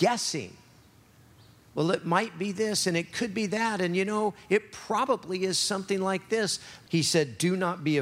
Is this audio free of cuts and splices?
no; 1 cut; at 6.9 s

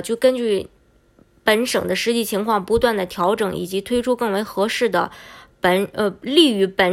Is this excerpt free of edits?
yes; 0 cuts

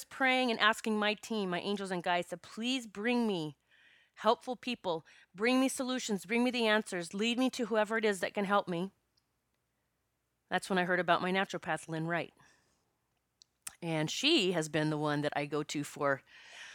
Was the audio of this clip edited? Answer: no; 0 cuts

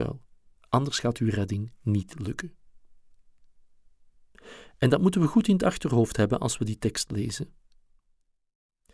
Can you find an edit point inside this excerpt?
no; 0 cuts

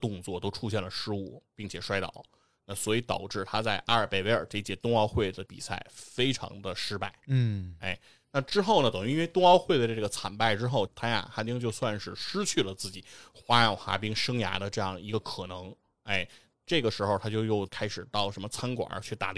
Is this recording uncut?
yes; 0 cuts

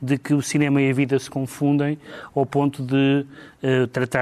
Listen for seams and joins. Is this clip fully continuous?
yes; 0 cuts

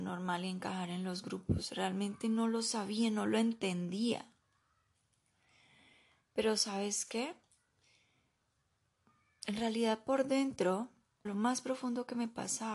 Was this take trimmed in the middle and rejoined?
yes; 1 cut; at 11.2 s

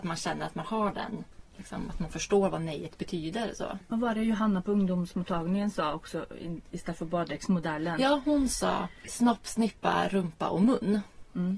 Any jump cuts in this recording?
yes; 1 cut; at 9.1 s

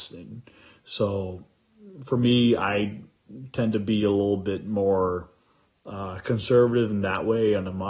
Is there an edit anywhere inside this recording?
no; 0 cuts

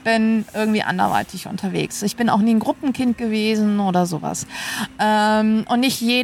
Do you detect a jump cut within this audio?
no; 0 cuts

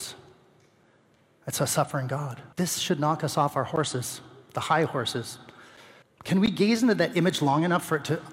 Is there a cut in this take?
yes; 2 cuts; at 2.5 s, 6.0 s

